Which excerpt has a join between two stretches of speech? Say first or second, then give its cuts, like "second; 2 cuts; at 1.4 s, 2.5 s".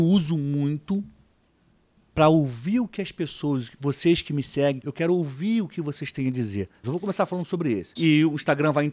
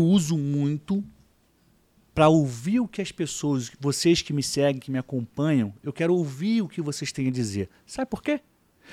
first; 3 cuts; at 4.8 s, 6.8 s, 8.0 s